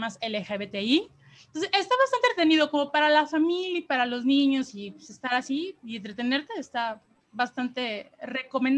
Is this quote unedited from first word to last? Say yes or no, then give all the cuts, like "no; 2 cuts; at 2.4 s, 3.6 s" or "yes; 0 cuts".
yes; 0 cuts